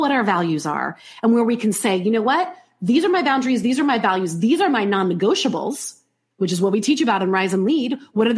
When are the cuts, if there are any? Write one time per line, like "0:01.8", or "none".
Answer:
none